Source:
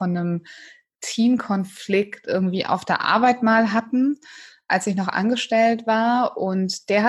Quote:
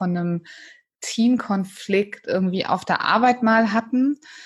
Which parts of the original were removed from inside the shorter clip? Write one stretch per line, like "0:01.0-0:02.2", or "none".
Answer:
none